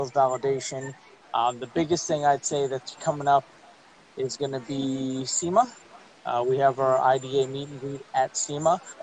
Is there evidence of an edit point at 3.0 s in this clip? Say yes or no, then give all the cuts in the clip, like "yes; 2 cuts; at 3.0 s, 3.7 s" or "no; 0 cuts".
yes; 2 cuts; at 1.2 s, 3.0 s